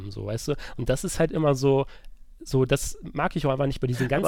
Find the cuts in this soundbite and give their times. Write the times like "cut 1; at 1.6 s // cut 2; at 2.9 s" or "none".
none